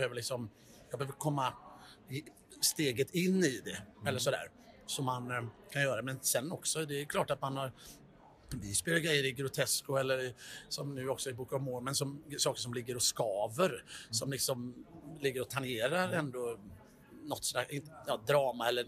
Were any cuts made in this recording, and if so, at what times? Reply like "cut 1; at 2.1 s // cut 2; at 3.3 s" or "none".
none